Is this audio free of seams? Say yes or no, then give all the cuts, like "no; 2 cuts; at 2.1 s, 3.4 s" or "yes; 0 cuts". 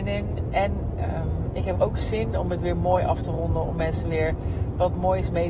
no; 1 cut; at 1.7 s